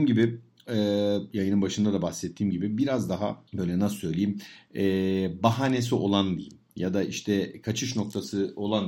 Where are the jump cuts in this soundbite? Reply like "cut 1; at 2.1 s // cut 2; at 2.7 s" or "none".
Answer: cut 1; at 3.5 s

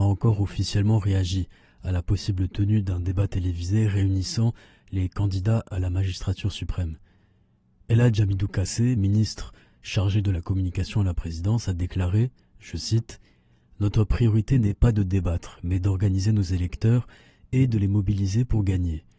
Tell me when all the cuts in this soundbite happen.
none

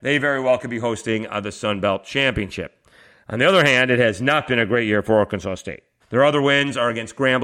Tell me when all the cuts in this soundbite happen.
cut 1; at 6.0 s

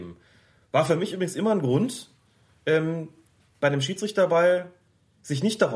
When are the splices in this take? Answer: none

